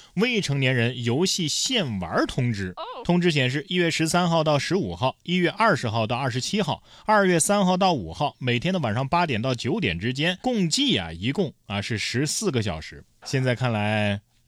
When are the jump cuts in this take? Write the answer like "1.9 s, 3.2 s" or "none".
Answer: 10.4 s, 13.2 s